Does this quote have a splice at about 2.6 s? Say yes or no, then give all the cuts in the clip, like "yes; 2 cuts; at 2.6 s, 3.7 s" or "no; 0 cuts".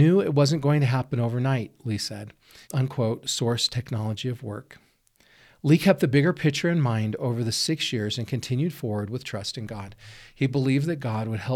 yes; 1 cut; at 2.6 s